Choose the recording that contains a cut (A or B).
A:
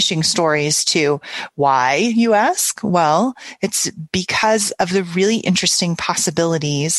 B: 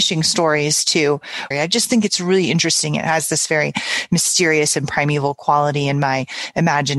B